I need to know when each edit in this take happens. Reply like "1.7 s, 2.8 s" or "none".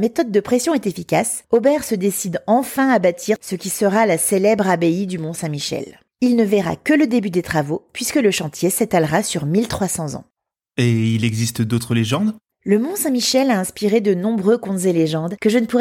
none